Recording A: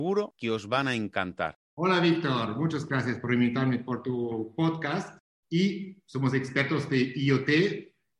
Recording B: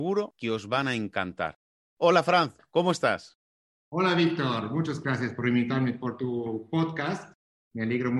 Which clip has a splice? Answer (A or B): A